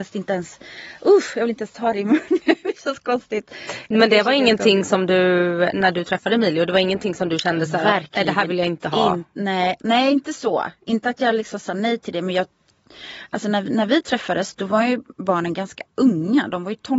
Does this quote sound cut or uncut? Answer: uncut